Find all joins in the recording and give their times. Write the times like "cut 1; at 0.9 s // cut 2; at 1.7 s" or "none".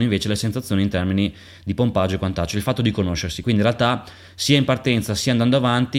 none